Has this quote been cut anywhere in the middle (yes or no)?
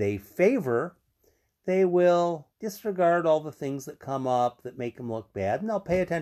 yes